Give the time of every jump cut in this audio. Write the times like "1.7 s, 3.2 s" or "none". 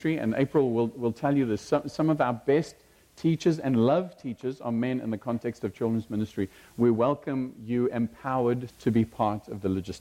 8.7 s